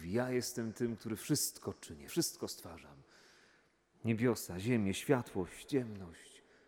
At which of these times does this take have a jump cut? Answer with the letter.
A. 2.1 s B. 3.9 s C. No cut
A